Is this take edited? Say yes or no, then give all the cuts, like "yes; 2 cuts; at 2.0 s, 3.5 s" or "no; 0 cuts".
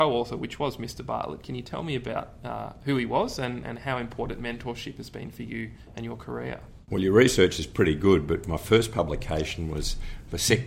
no; 0 cuts